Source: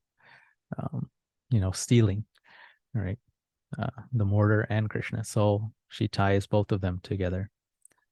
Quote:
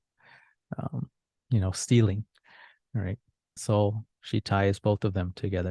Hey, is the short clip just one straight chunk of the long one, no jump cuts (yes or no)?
no